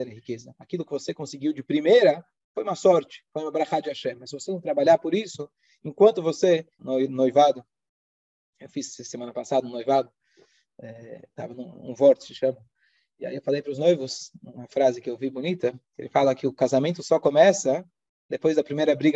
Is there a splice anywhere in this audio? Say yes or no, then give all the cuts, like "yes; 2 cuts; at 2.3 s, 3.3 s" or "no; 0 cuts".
yes; 1 cut; at 6.8 s